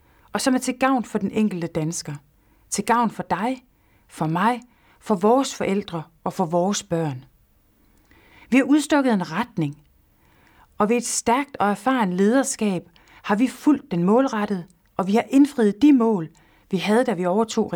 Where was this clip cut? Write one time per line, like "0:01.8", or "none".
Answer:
none